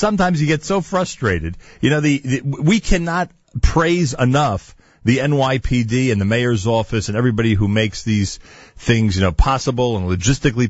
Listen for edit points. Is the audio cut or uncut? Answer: uncut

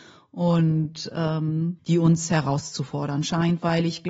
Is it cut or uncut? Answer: cut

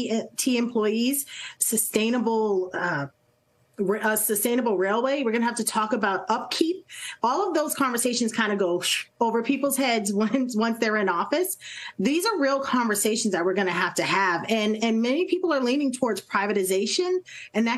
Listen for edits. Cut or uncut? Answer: cut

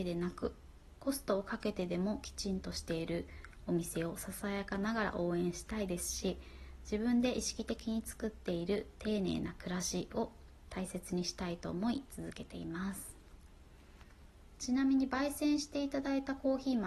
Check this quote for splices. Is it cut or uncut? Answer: uncut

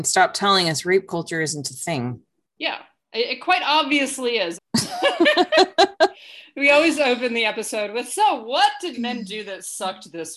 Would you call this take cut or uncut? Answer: cut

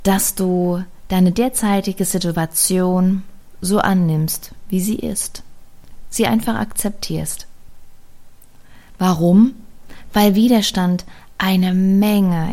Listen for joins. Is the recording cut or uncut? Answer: uncut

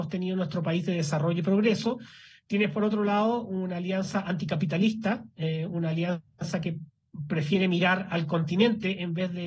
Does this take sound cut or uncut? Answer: uncut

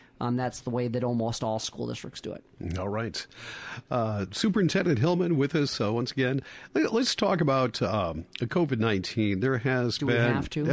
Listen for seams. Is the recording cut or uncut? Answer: uncut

